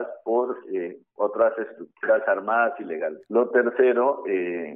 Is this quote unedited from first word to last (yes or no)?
no